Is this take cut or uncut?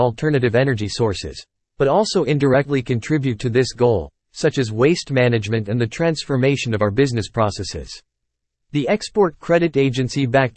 uncut